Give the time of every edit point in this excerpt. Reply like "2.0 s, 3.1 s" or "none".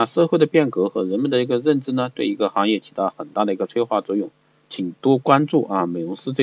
4.6 s